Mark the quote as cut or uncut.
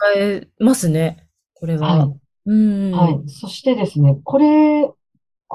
uncut